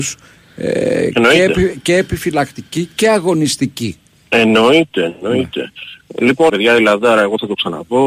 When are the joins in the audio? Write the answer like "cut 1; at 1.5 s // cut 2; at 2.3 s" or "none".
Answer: cut 1; at 6.5 s